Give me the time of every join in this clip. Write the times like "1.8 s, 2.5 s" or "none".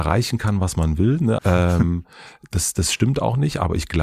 1.4 s